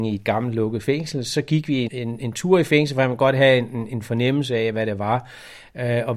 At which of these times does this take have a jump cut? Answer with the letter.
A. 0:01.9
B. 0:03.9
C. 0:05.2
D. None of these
A